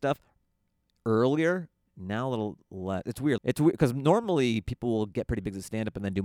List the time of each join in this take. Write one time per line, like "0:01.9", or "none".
0:01.9
0:03.4